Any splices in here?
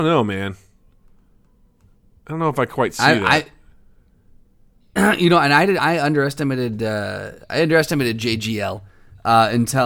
no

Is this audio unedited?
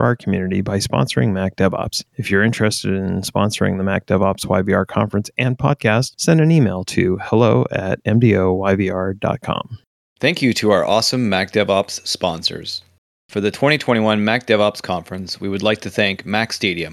yes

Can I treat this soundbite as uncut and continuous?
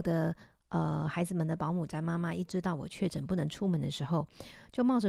yes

